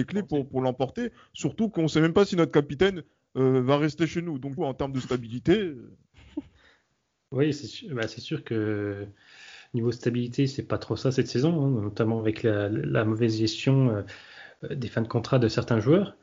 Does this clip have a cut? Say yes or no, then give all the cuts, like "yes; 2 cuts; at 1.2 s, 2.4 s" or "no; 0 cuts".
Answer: yes; 1 cut; at 4.6 s